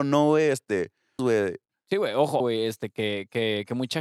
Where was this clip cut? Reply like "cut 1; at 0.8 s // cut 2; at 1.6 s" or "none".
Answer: cut 1; at 1.2 s // cut 2; at 2.4 s